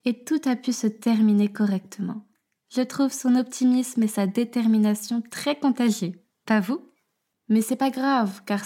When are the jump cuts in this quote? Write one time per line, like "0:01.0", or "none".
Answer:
0:07.3